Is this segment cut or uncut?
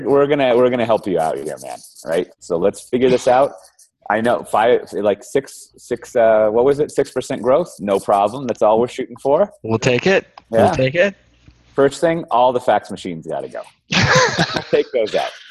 uncut